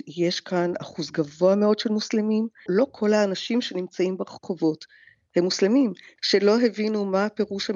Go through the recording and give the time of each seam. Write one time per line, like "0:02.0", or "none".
0:02.7
0:06.2